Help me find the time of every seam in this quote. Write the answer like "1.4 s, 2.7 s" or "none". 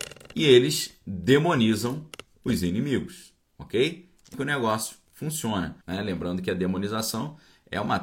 4.3 s, 5.8 s